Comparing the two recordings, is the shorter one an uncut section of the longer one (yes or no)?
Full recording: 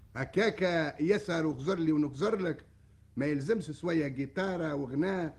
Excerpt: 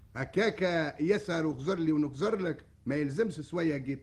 no